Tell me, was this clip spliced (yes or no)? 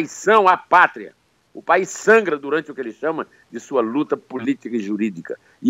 no